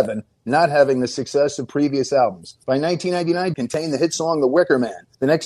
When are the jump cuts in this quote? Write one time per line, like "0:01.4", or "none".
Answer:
0:03.5